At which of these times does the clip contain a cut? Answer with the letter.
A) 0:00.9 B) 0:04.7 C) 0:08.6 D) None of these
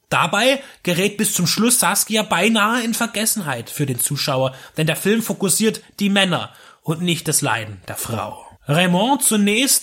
C